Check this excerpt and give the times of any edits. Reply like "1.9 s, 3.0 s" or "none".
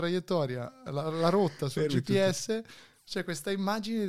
none